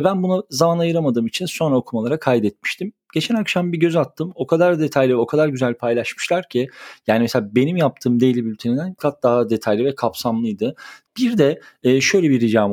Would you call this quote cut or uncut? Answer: cut